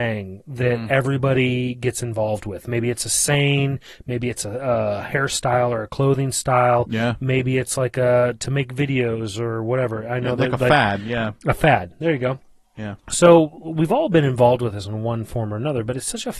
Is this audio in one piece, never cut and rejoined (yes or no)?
yes